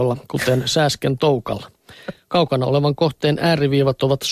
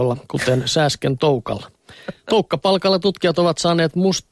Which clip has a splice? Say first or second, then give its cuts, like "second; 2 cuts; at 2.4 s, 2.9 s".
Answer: first; 1 cut; at 2.2 s